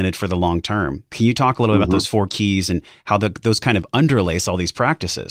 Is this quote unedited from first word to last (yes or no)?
yes